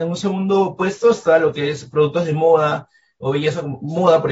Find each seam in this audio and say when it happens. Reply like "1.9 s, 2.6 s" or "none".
none